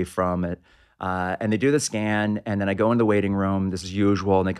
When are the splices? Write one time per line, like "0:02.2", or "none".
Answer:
none